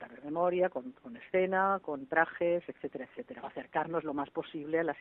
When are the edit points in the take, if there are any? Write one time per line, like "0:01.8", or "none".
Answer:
0:03.4

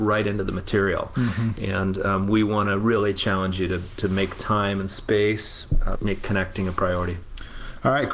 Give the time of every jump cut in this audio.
0:05.9

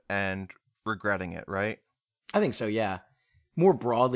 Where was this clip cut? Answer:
none

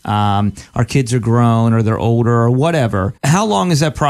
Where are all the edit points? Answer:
0:03.2

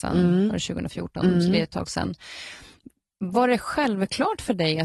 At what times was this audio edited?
none

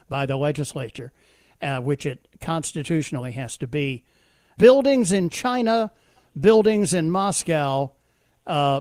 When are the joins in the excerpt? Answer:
0:04.6

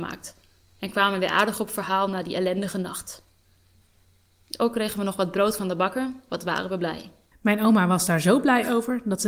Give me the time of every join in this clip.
0:07.3

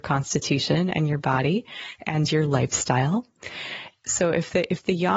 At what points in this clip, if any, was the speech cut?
0:04.0

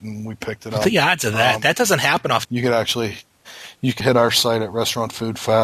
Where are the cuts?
0:02.4
0:04.0

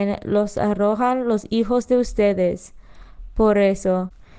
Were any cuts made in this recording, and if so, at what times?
none

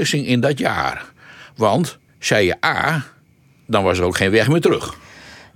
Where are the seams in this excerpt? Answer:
0:02.1

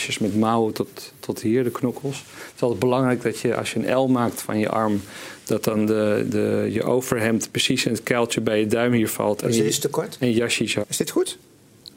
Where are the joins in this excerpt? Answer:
0:10.8

